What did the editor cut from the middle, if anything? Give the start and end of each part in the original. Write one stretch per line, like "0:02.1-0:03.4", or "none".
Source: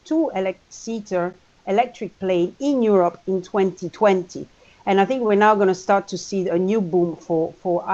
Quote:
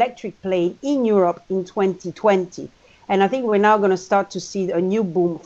none